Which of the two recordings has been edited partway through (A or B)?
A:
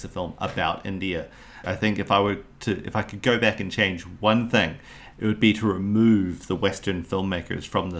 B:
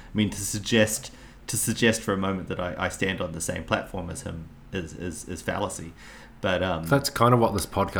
A